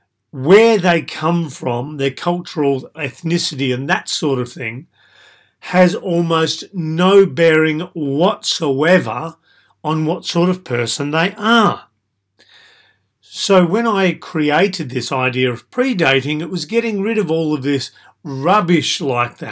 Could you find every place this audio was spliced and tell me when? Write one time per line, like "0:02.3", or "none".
none

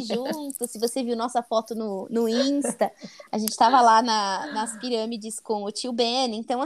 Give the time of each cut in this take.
none

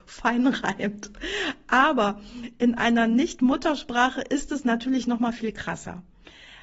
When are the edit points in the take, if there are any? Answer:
none

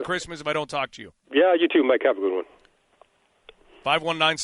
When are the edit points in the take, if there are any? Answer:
0:01.2

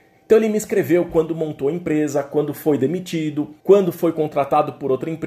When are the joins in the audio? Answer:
0:03.6

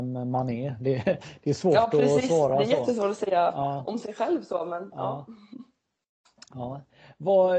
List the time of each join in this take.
none

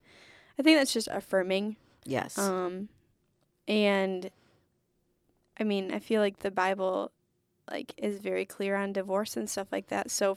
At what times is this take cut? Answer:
none

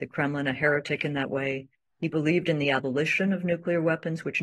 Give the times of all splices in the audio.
none

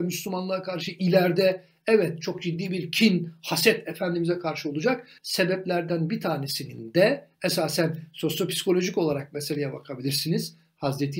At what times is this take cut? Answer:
0:05.2

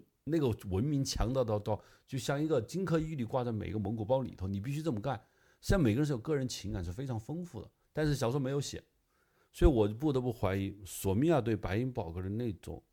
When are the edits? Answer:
0:07.8

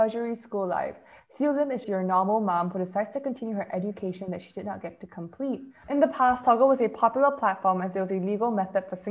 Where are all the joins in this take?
0:01.8
0:05.8

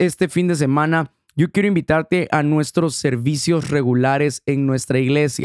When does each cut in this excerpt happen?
none

